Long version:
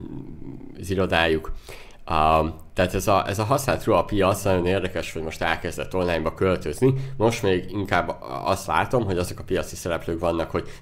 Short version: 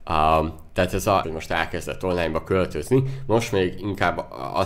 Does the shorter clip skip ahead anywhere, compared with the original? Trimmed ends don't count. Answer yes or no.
yes